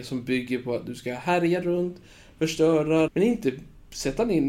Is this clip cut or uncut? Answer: cut